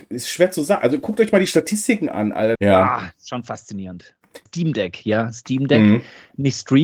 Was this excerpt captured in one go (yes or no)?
no